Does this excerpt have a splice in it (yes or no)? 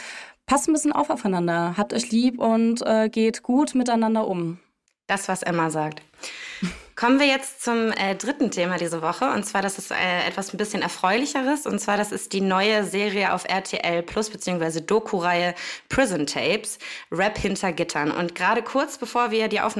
no